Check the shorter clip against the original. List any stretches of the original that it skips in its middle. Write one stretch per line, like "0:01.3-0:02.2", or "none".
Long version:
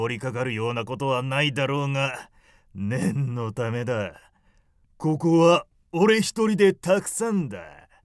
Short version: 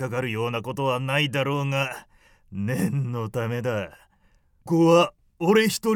0:04.9-0:05.2